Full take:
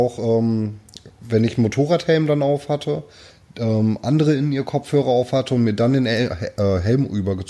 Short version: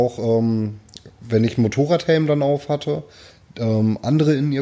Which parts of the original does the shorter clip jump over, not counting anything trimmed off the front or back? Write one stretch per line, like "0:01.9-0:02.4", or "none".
none